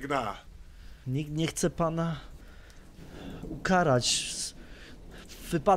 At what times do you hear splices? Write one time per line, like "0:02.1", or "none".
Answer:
0:01.0